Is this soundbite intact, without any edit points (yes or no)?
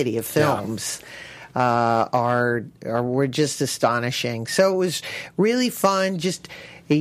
yes